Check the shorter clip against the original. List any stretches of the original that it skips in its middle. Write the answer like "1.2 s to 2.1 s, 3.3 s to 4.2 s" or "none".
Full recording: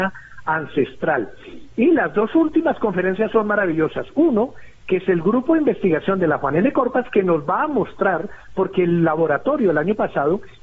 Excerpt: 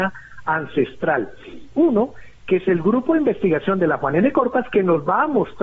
1.7 s to 4.1 s